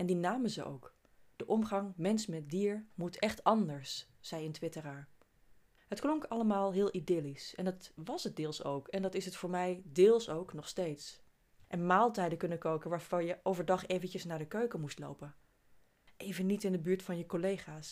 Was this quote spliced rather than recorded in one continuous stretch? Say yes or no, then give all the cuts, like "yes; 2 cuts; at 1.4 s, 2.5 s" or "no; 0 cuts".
yes; 1 cut; at 11.6 s